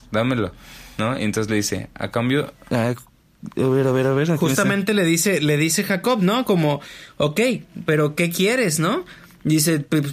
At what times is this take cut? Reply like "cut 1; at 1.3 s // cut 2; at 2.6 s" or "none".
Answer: none

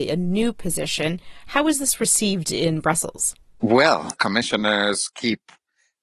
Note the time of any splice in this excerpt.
cut 1; at 4.2 s

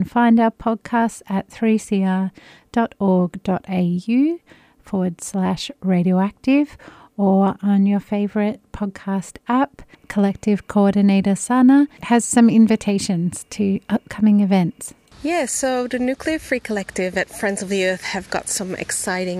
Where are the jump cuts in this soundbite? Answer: cut 1; at 9.9 s

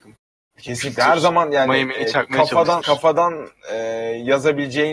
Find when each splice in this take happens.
cut 1; at 2.8 s

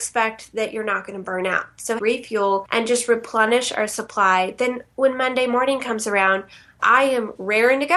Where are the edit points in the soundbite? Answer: cut 1; at 2.0 s // cut 2; at 6.8 s

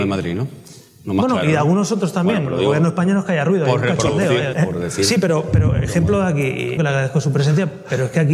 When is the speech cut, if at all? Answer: cut 1; at 4.5 s // cut 2; at 6.8 s

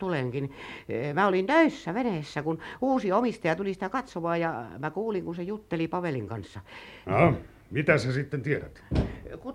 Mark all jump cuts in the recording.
cut 1; at 7.0 s

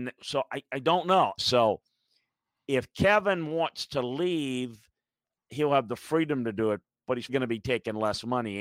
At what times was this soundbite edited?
cut 1; at 1.4 s // cut 2; at 7.3 s

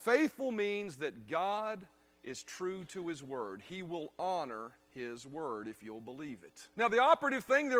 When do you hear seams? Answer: cut 1; at 6.7 s

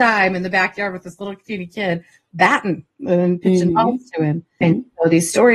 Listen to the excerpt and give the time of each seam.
cut 1; at 4.6 s

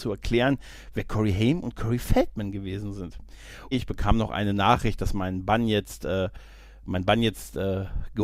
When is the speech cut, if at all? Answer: cut 1; at 3.7 s

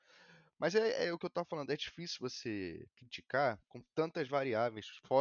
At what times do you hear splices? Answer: none

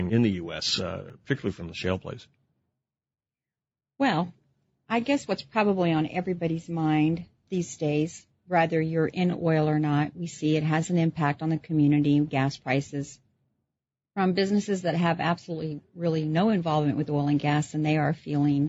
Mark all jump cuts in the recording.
none

